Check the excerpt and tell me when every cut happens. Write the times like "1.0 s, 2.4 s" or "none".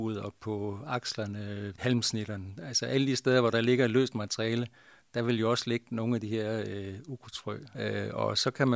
1.8 s, 7.7 s